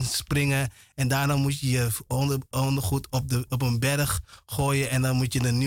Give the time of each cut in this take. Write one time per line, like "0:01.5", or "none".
none